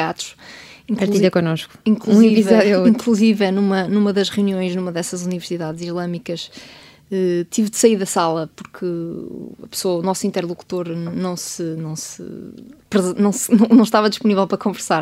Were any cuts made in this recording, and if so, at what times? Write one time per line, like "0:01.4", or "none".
none